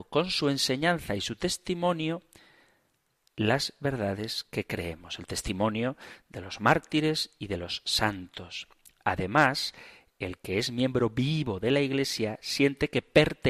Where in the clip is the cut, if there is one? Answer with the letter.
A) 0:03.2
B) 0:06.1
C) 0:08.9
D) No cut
D